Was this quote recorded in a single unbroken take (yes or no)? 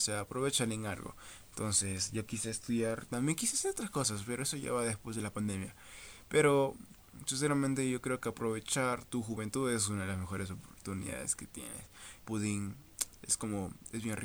no